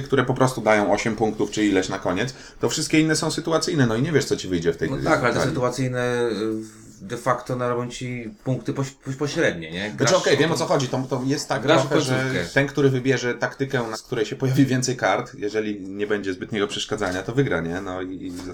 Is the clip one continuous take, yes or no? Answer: no